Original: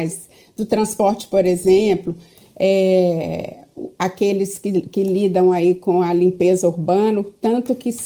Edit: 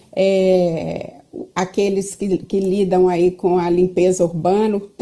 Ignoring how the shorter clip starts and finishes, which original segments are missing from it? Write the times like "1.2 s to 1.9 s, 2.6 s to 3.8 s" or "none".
none